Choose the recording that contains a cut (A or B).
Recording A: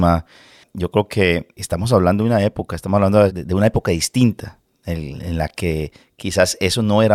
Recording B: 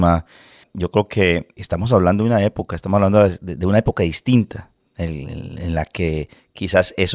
A